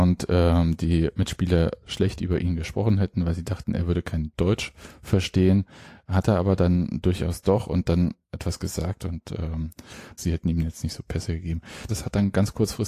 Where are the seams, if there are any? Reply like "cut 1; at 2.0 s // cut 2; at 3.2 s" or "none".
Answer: cut 1; at 10.2 s // cut 2; at 11.9 s